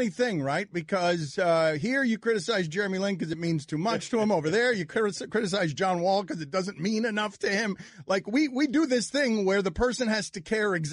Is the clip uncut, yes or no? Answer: yes